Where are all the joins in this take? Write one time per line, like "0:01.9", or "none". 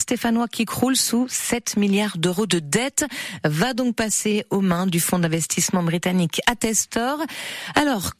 none